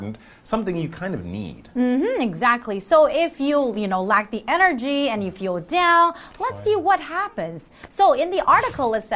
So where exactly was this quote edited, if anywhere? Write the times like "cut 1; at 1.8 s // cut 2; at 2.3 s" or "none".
none